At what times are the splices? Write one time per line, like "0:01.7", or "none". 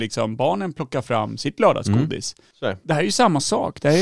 0:02.5